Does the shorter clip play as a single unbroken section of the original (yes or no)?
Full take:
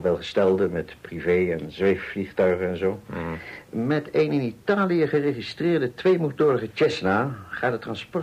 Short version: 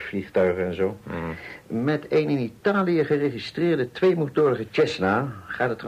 yes